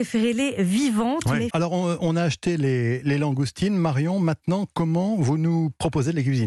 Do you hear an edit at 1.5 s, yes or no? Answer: yes